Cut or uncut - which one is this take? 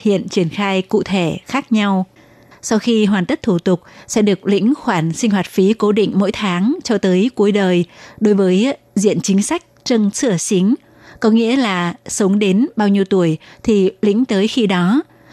cut